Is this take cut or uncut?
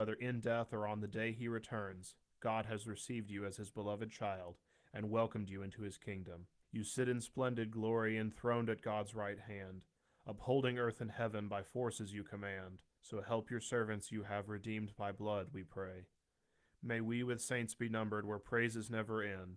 cut